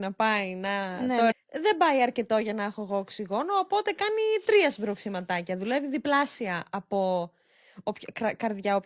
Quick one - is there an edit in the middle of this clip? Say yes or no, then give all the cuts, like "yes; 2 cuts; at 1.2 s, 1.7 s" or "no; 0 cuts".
yes; 1 cut; at 1.3 s